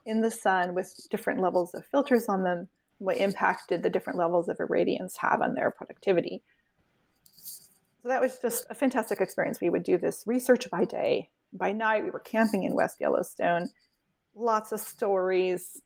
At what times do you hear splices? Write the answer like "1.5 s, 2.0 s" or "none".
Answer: 2.9 s